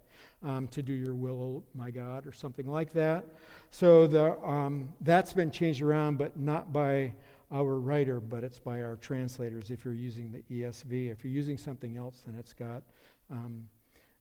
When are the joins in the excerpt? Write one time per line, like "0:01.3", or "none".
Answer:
none